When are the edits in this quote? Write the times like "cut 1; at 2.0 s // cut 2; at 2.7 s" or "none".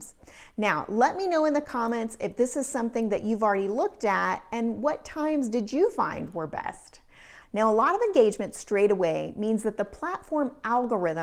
cut 1; at 7.4 s